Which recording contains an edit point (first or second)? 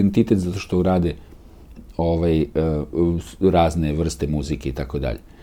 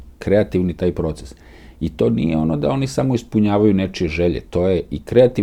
first